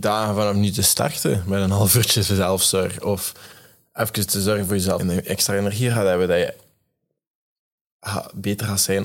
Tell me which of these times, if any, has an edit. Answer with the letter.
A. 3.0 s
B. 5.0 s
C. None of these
B